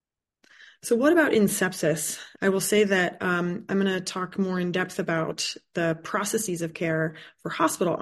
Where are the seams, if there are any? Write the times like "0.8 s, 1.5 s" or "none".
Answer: 2.4 s